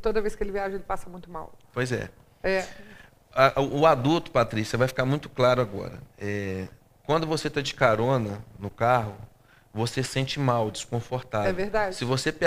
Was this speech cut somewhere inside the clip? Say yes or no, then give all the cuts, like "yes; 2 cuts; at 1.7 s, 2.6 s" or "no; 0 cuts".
no; 0 cuts